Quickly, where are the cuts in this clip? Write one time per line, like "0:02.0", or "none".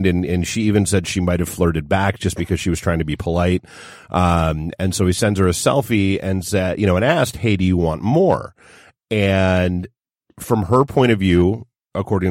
none